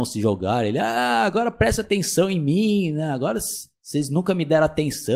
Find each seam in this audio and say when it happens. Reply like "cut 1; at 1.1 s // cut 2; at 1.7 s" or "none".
none